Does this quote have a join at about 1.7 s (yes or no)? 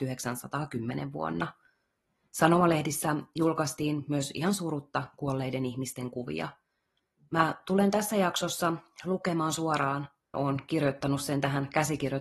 no